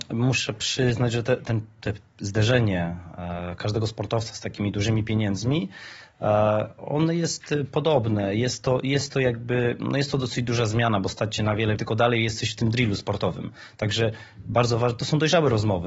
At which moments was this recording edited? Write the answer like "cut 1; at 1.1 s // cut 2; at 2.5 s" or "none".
cut 1; at 11.8 s